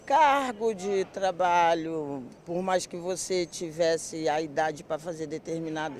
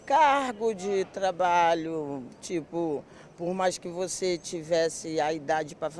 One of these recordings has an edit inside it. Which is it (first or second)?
first